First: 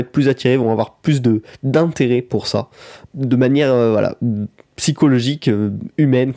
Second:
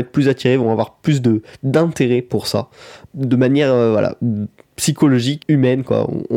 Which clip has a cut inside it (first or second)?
second